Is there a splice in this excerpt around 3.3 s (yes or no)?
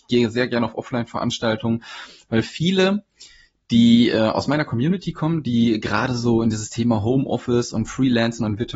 no